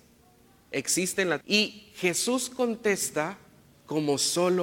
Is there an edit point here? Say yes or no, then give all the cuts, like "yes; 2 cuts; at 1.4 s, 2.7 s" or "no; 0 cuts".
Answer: yes; 1 cut; at 1.4 s